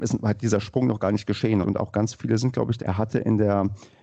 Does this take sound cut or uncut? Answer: cut